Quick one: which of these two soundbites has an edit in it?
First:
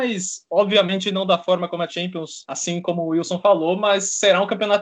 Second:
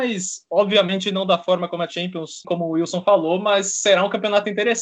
second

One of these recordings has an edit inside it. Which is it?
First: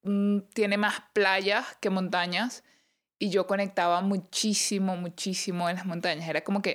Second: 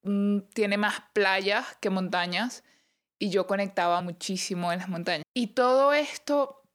second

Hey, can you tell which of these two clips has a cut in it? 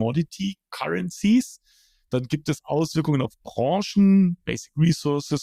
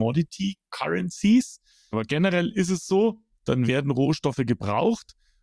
second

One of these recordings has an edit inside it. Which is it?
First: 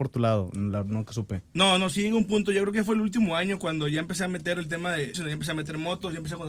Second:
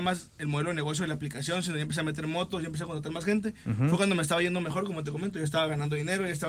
first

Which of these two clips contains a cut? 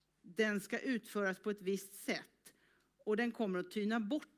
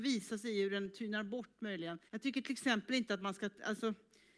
second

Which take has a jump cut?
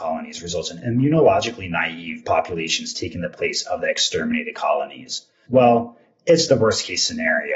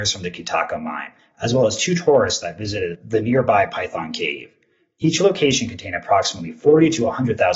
first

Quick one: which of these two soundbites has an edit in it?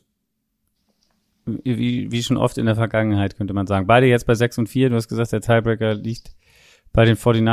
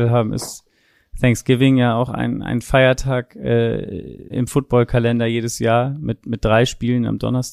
second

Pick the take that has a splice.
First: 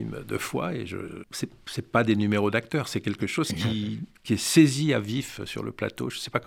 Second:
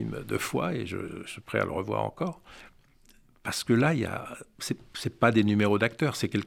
first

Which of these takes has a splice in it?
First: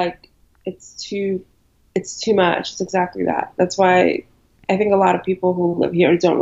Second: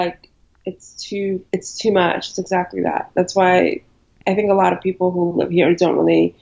second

